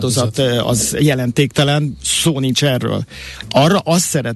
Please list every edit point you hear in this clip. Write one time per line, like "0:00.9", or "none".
none